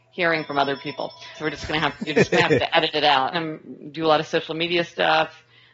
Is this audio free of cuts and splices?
no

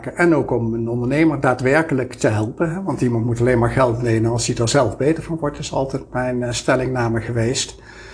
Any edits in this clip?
no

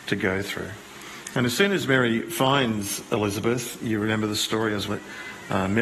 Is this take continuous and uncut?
no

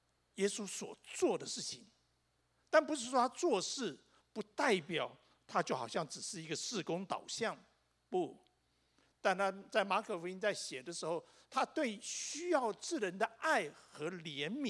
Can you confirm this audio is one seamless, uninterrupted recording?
yes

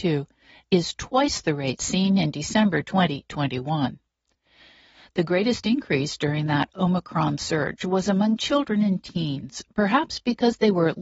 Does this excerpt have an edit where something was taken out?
no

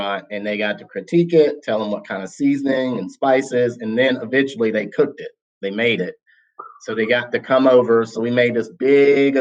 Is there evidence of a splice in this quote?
no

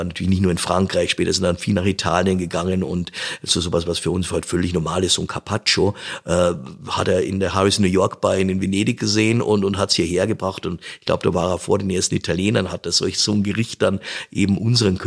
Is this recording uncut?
yes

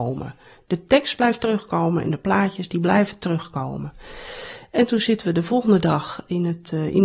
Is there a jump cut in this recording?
no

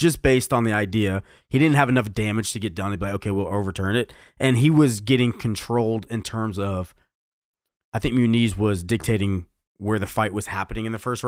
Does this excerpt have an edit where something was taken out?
no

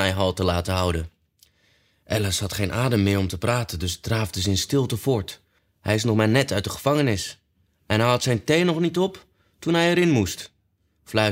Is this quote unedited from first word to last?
no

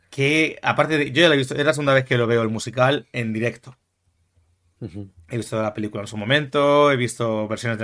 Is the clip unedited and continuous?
yes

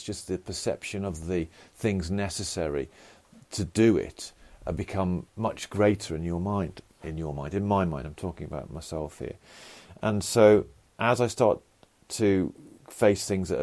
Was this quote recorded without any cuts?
yes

